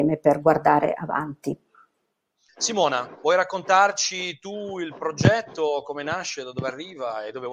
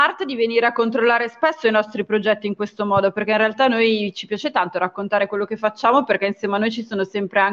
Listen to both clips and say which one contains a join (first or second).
first